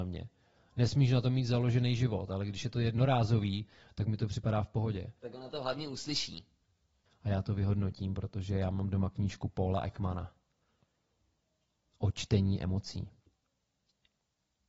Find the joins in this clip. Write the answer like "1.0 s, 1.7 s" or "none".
5.2 s, 7.1 s